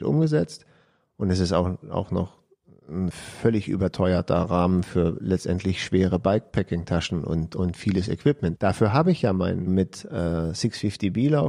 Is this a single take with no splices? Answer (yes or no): no